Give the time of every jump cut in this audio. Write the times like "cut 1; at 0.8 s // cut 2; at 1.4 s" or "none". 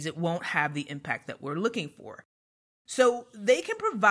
none